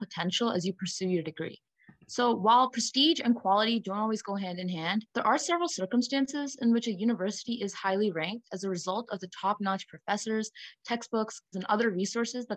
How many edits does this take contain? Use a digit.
2